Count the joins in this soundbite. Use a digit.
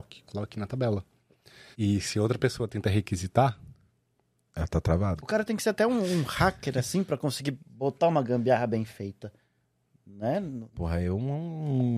2